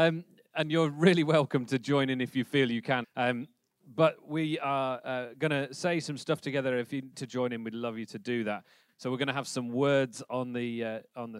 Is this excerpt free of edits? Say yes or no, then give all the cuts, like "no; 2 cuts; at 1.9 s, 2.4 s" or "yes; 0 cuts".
no; 3 cuts; at 3.0 s, 7.1 s, 8.9 s